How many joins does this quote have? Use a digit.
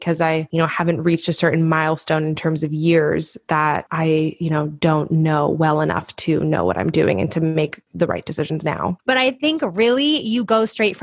1